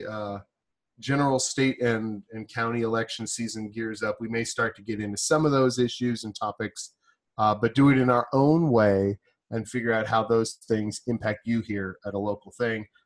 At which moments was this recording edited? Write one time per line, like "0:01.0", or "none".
none